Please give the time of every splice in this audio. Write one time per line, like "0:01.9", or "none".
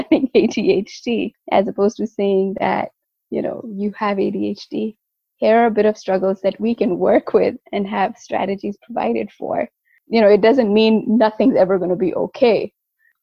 none

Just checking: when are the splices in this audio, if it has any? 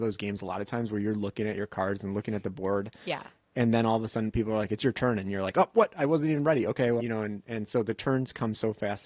0:07.0

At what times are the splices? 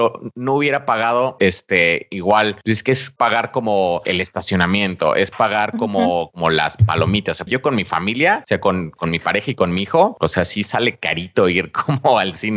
0:07.5

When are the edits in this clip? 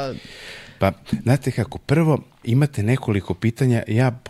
0:02.4

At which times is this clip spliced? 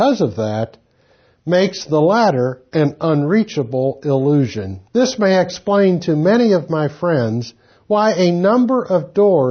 0:04.9

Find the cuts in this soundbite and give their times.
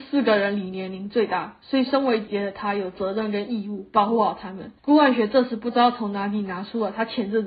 0:02.3
0:04.8

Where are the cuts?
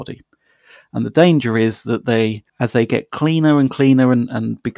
0:02.5

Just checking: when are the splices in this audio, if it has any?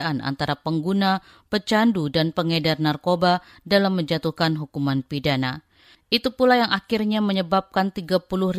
none

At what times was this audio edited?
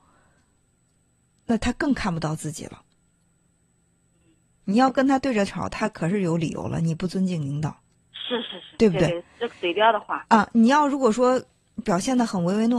none

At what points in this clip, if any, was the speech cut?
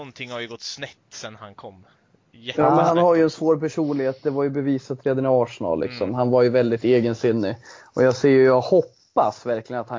none

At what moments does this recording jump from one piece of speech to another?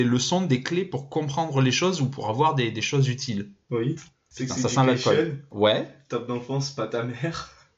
none

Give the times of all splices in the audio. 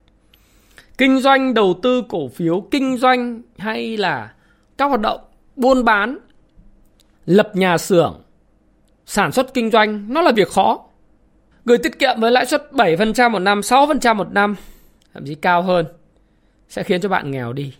0:07.1
0:11.5
0:15.0

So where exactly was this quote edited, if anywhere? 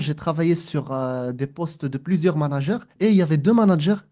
0:02.9

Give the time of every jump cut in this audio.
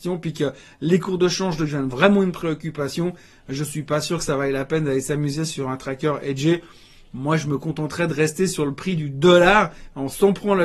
none

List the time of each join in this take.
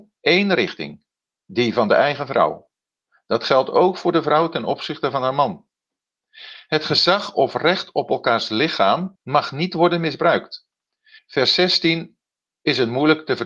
0:09.2
0:11.2

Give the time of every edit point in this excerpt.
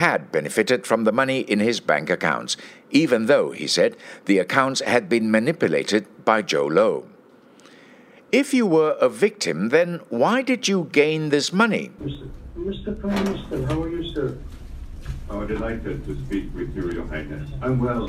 0:12.0

